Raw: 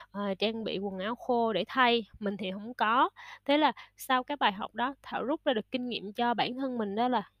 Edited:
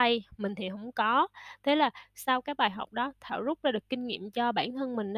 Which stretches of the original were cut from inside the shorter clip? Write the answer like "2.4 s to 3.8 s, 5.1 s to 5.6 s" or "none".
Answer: none